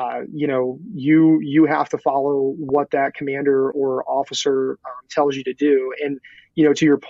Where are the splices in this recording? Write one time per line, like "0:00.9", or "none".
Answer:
none